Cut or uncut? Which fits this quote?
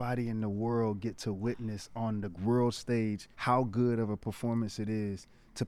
cut